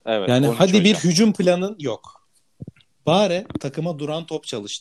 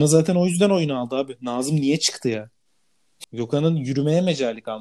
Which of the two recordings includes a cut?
second; 1 cut; at 3.2 s

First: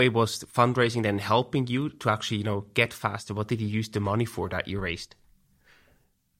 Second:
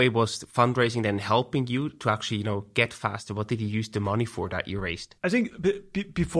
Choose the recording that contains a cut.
second; 1 cut; at 5.2 s

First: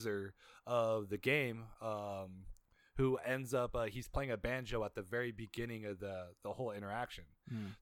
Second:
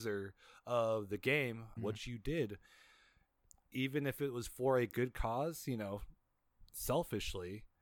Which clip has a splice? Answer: second; 1 cut; at 1.8 s

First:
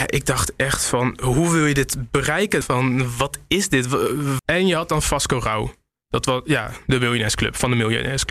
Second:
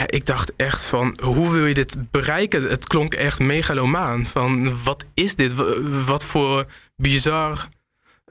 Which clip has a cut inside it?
first; 2 cuts; at 2.6 s, 4.4 s

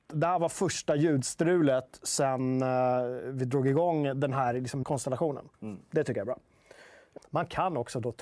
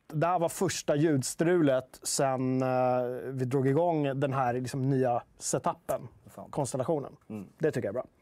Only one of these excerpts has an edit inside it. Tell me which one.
first; 2 cuts; at 4.8 s, 7.2 s

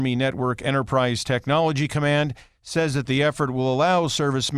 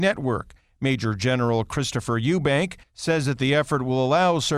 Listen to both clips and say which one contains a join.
second; 1 cut; at 2.8 s

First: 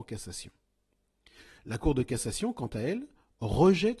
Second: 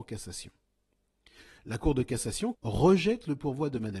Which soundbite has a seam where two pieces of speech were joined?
second; 1 cut; at 2.5 s

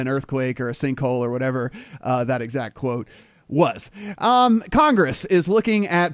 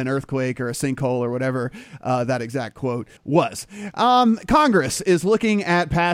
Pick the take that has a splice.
second; 1 cut; at 3.2 s

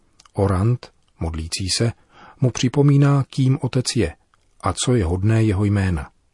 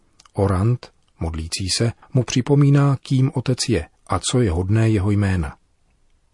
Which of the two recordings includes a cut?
second; 2 cuts; at 2.0 s, 4.0 s

